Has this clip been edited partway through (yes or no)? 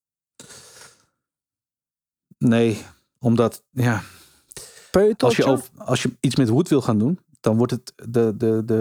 no